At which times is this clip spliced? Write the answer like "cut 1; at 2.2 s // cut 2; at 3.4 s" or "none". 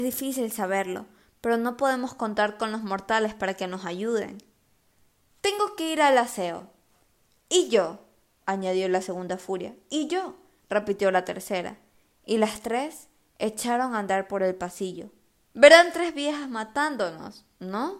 cut 1; at 5.3 s // cut 2; at 15.5 s